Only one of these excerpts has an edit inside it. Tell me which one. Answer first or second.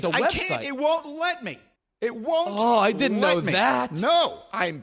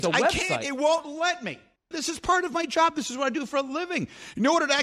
second